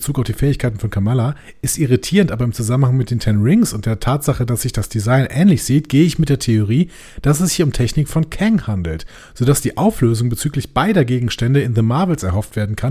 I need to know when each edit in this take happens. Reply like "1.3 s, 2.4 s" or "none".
none